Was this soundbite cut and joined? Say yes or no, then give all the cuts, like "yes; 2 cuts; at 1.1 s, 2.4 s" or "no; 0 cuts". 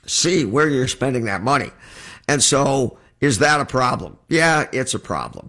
no; 0 cuts